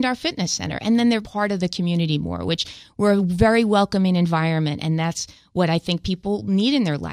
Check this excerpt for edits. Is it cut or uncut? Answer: cut